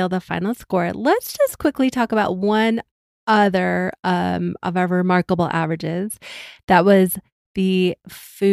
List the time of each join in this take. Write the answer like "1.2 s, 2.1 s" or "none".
none